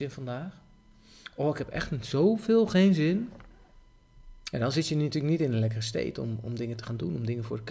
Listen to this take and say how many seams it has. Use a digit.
1